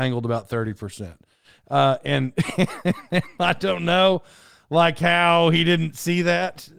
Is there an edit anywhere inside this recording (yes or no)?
no